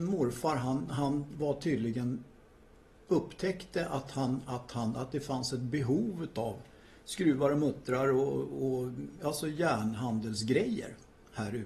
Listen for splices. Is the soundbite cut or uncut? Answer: uncut